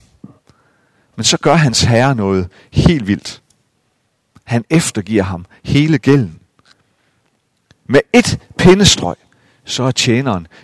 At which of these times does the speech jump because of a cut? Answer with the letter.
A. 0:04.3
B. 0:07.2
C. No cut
C